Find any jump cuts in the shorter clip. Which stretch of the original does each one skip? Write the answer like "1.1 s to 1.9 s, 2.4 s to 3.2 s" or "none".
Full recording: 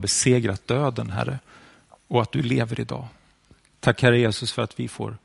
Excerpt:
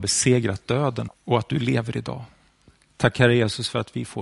1.1 s to 1.9 s